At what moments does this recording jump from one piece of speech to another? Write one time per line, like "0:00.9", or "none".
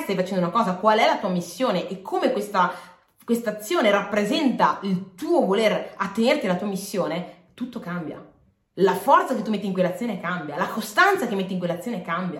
0:08.7